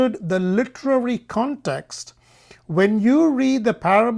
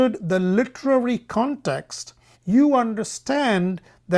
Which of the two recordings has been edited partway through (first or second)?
second